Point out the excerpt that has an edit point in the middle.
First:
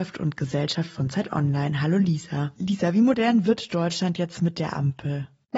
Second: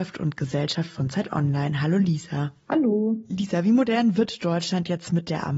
first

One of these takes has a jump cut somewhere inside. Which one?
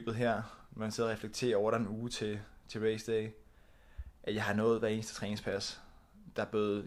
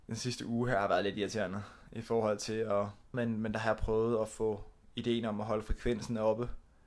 second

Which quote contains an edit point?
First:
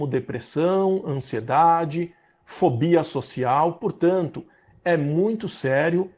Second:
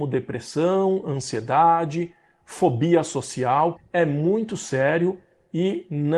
second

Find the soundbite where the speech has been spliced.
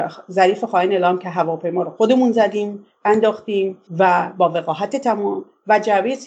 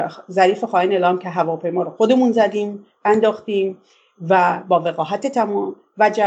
first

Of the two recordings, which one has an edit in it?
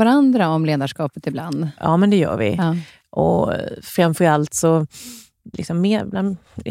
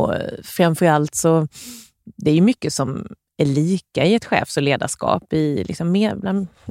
first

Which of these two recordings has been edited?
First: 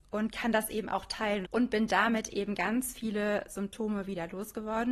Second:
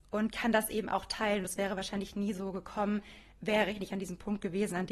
first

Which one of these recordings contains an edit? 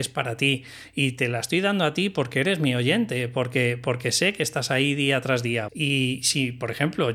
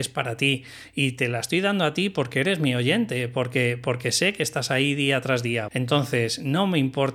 first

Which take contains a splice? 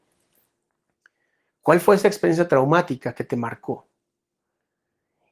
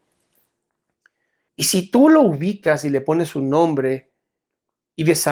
second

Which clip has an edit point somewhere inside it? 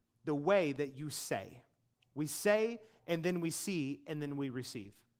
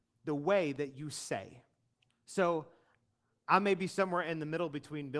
second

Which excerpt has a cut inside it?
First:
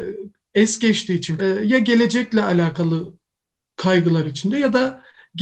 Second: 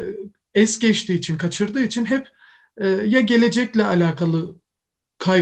first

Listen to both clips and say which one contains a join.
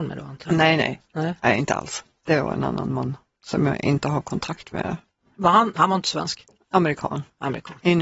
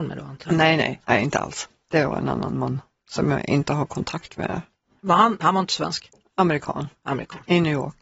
second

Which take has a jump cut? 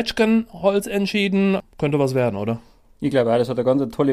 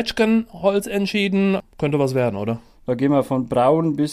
second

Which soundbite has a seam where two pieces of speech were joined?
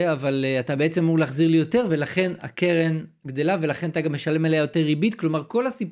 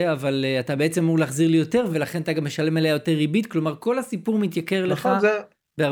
second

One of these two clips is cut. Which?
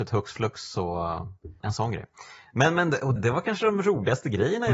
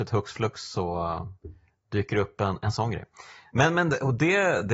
first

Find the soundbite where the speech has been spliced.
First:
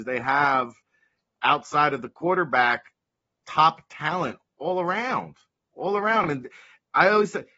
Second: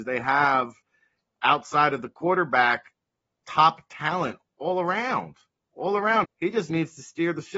second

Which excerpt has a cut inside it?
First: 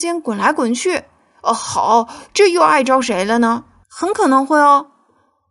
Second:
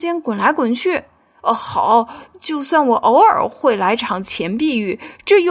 first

